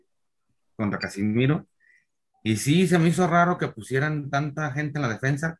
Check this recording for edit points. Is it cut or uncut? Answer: uncut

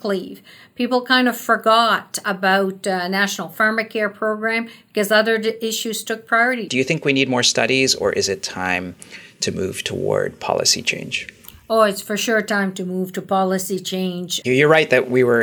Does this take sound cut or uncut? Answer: cut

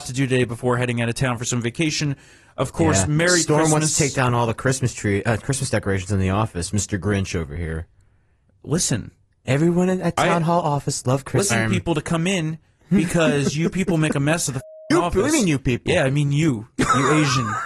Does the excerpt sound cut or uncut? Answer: cut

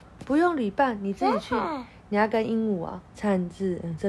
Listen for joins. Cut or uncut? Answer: cut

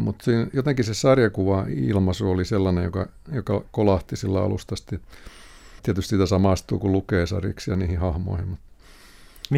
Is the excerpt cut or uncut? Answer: cut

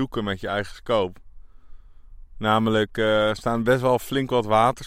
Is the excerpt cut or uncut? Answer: uncut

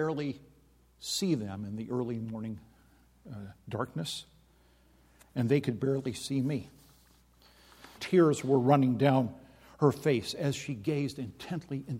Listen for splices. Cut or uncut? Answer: cut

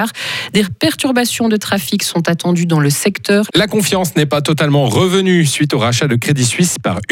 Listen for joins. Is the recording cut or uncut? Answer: cut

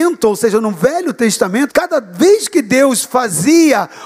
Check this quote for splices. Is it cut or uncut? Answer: cut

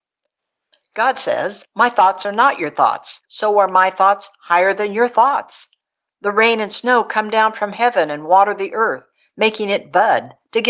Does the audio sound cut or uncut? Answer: cut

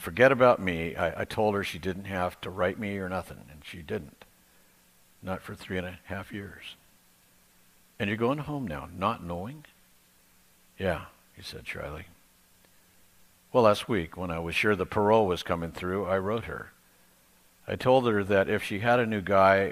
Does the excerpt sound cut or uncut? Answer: uncut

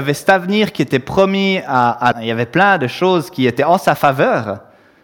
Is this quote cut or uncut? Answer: cut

